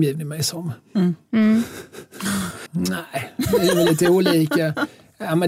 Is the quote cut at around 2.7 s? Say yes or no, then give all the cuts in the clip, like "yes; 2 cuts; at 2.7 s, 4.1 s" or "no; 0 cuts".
yes; 1 cut; at 2.7 s